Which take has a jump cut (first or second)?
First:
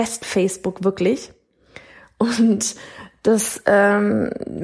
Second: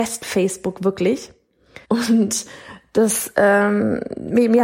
second